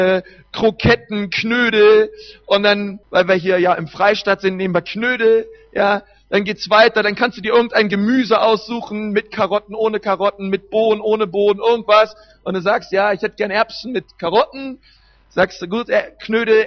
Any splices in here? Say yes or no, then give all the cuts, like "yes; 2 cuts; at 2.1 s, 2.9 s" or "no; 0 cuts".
yes; 1 cut; at 3.0 s